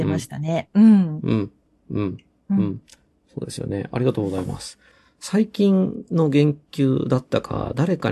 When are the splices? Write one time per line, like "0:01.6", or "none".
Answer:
none